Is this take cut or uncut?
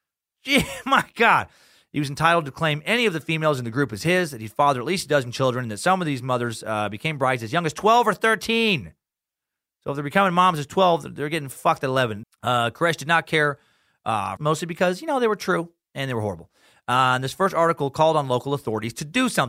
cut